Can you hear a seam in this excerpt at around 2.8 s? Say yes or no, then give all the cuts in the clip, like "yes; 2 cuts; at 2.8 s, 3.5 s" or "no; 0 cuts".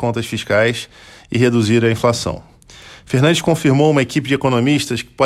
no; 0 cuts